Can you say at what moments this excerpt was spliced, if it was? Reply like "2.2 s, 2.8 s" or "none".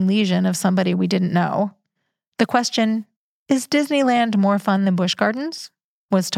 none